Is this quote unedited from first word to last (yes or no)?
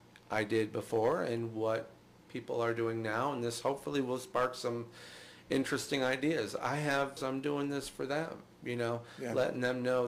no